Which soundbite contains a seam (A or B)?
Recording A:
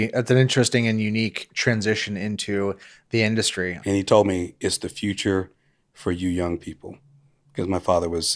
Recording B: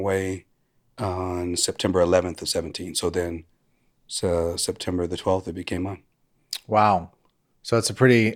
A